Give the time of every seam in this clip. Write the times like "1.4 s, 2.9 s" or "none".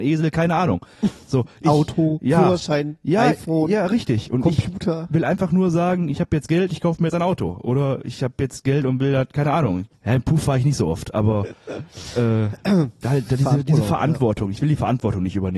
9.9 s, 13.0 s